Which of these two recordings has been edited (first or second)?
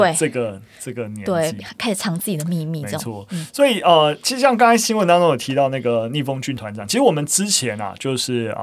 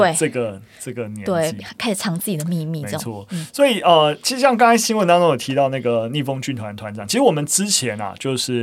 first